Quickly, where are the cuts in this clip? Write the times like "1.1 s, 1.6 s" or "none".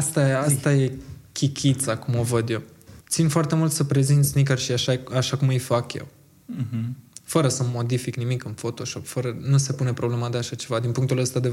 3.0 s

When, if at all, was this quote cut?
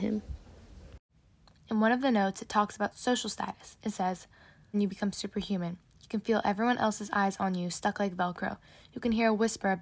1.5 s, 4.7 s

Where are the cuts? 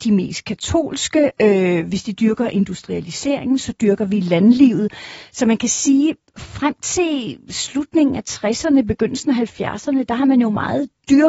none

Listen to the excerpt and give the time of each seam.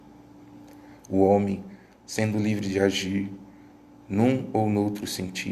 none

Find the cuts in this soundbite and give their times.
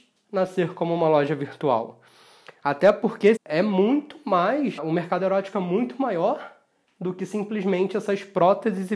3.4 s, 4.8 s

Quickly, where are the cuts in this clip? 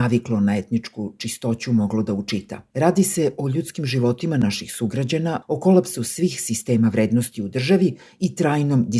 2.7 s, 5.4 s

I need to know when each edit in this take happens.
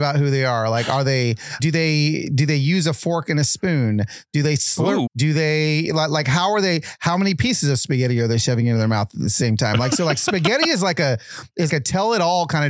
1.6 s, 5.1 s, 11.7 s

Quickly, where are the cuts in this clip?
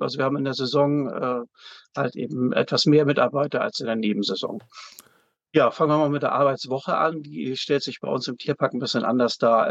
5.5 s

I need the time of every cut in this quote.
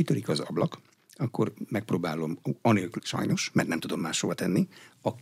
3.0 s

